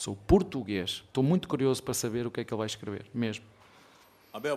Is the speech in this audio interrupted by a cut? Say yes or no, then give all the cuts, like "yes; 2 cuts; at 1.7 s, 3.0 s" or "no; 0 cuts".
no; 0 cuts